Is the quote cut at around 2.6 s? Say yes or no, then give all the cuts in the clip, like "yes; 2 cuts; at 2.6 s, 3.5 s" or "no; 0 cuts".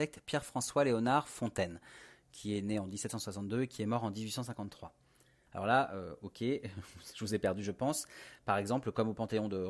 no; 2 cuts; at 5.5 s, 8.4 s